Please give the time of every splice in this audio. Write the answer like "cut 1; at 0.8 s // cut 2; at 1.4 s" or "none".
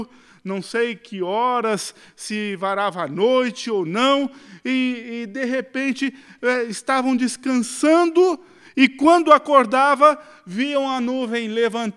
none